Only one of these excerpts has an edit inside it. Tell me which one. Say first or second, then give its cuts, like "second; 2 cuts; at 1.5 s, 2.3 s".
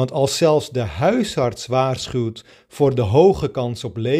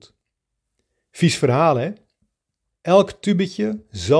second; 1 cut; at 2.7 s